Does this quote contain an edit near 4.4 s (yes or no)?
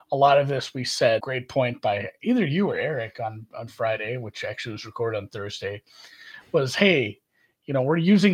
no